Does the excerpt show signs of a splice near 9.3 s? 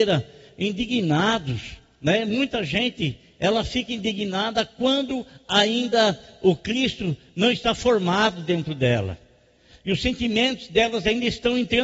no; 0 cuts

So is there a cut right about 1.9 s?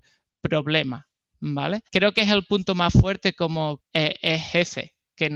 yes; 2 cuts; at 1.9 s, 3.8 s

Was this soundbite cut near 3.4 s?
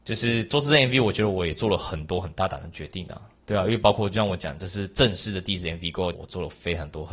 yes; 2 cuts; at 3.4 s, 6.1 s

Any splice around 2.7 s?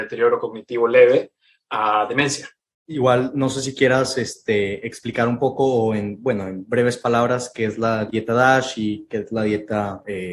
no; 0 cuts

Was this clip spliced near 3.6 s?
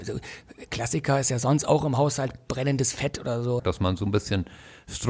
yes; 1 cut; at 3.6 s

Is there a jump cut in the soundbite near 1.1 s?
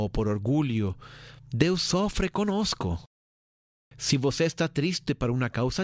no; 1 cut; at 3.9 s

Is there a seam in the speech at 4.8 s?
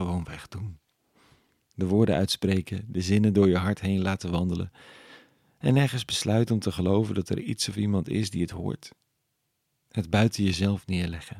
no; 0 cuts

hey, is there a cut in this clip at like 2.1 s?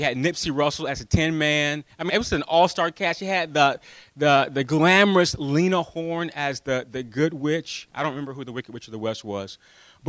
yes; 1 cut; at 2.1 s

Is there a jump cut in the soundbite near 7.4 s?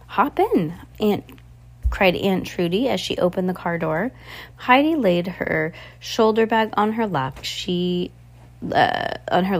yes; 3 cuts; at 0.9 s, 4.5 s, 7.4 s

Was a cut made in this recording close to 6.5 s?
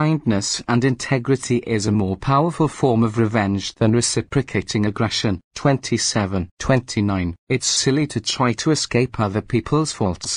yes; 1 cut; at 6.5 s

